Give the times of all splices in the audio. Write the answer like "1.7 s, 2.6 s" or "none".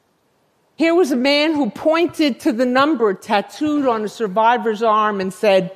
none